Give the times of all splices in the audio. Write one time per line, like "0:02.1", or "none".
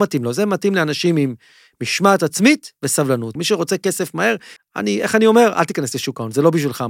0:03.4
0:04.6